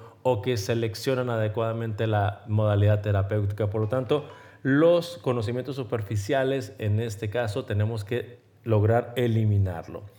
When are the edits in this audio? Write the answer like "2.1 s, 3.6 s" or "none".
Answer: none